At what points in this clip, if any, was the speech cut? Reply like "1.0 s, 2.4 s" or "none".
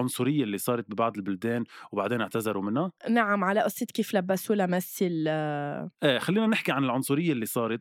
3.0 s, 5.9 s